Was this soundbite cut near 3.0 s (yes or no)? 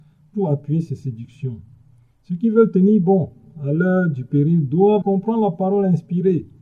no